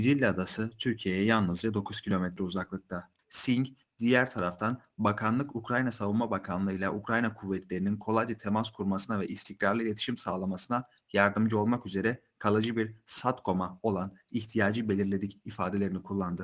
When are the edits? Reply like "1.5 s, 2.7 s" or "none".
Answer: 3.2 s